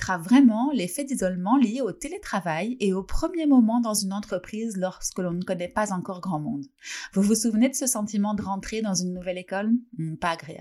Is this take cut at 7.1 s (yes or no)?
no